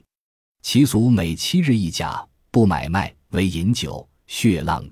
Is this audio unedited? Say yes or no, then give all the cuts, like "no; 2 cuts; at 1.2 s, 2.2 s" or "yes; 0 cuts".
no; 1 cut; at 3.3 s